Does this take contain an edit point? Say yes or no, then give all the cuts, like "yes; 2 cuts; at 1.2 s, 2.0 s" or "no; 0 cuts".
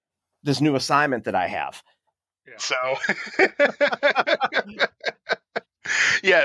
yes; 1 cut; at 2.6 s